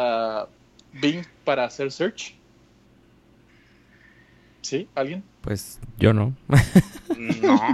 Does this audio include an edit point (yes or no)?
no